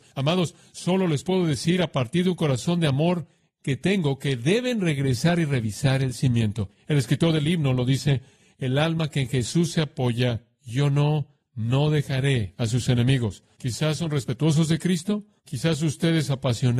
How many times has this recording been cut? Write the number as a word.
two